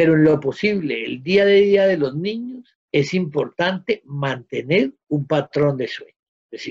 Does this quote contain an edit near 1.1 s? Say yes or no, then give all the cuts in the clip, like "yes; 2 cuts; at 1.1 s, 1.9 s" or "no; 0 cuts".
no; 1 cut; at 2.8 s